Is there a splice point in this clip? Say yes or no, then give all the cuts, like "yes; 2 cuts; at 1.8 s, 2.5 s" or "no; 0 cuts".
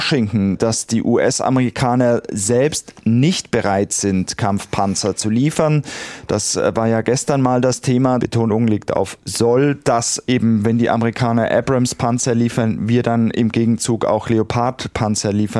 yes; 1 cut; at 8.2 s